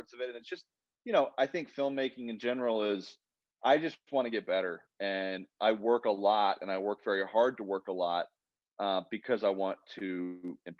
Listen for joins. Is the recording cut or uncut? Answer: uncut